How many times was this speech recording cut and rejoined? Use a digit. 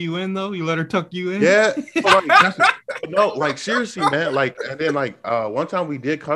1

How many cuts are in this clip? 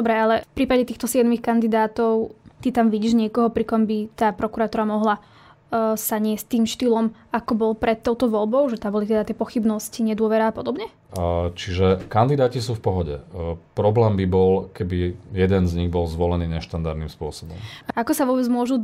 1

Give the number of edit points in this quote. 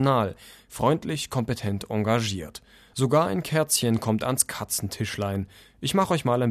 0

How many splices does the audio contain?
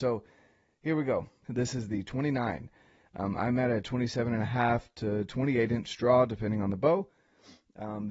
1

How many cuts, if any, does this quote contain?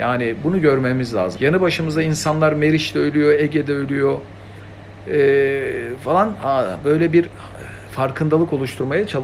1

